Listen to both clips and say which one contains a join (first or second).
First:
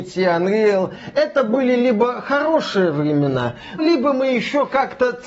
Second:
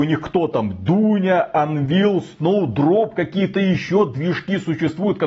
first